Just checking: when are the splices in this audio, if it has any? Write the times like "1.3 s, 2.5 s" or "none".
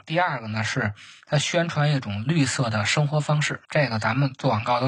3.6 s

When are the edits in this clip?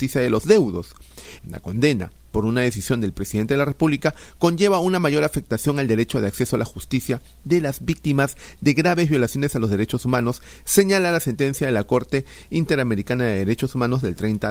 1.4 s

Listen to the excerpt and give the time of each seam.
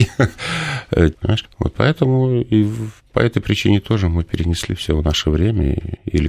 1.1 s

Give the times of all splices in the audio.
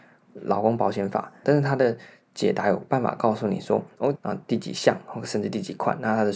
1.4 s, 4.1 s

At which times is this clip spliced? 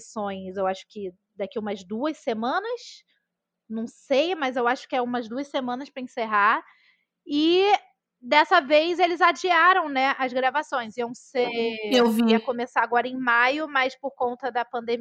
none

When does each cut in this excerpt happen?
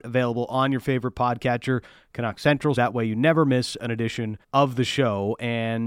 2.8 s, 4.4 s

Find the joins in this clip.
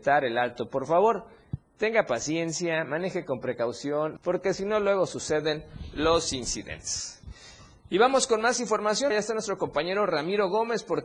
4.2 s, 9.1 s

